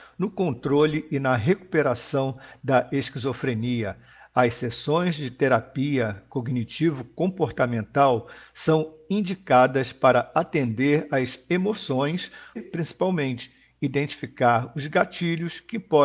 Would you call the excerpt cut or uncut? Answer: cut